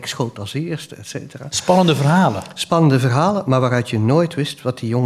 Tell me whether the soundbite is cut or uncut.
uncut